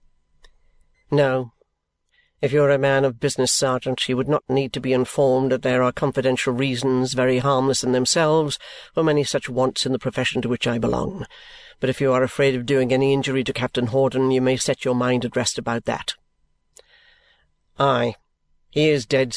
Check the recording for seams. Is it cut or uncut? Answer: cut